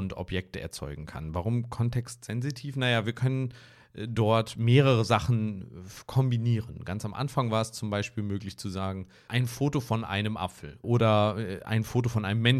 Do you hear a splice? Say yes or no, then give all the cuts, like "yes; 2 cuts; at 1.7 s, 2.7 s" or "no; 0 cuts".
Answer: yes; 2 cuts; at 9.3 s, 10.8 s